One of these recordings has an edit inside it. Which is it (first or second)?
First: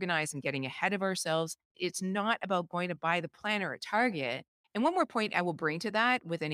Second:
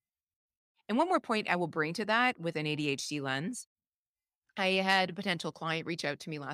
first